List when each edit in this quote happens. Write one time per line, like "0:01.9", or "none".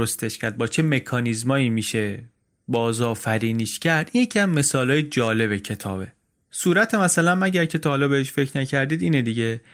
none